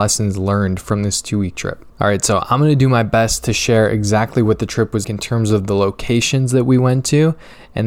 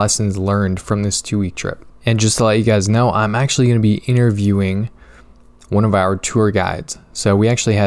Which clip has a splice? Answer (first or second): first